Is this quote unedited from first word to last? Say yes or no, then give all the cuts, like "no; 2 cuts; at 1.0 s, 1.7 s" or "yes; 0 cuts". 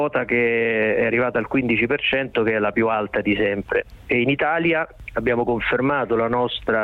yes; 0 cuts